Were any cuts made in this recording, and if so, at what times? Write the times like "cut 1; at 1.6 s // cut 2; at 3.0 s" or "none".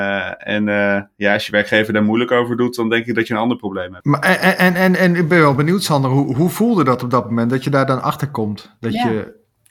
none